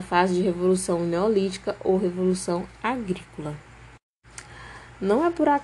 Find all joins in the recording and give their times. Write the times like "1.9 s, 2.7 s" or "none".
none

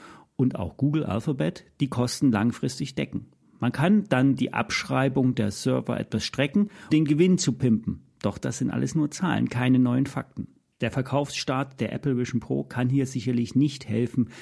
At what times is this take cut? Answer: 6.9 s, 10.7 s

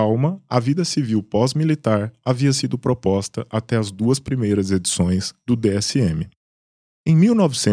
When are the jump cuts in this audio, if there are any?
none

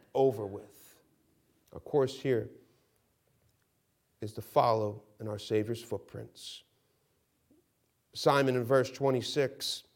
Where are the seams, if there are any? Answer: 1.6 s

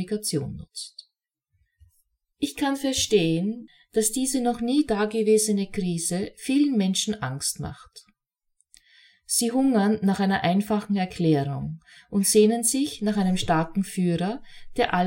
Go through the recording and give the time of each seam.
none

